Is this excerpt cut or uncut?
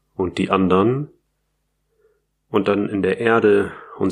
uncut